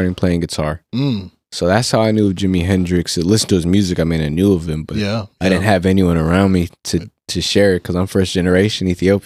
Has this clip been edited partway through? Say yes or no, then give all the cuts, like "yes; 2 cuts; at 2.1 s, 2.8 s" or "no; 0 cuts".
no; 0 cuts